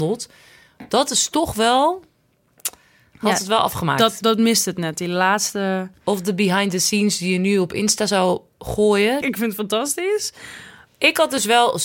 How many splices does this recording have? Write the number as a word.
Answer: two